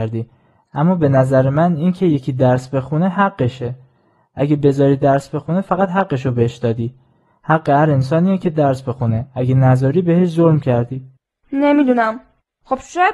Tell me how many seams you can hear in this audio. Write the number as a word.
zero